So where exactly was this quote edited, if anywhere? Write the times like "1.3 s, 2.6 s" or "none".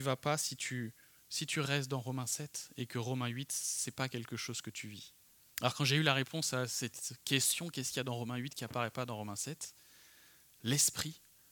5.5 s